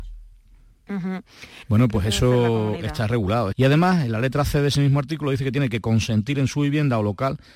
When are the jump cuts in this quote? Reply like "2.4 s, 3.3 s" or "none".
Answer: 1.6 s, 3.5 s